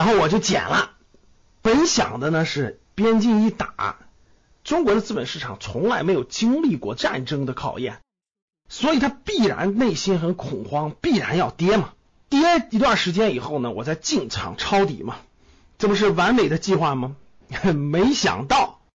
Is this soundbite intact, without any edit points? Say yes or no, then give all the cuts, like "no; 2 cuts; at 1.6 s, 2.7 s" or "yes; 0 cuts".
yes; 0 cuts